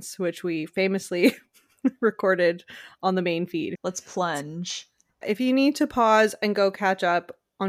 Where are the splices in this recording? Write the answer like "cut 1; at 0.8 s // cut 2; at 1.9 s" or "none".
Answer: cut 1; at 3.8 s // cut 2; at 5.2 s